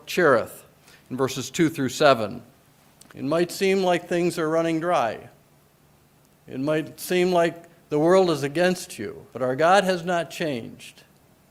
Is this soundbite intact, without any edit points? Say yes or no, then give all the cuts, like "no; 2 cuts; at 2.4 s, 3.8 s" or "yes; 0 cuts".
no; 2 cuts; at 3.1 s, 9.3 s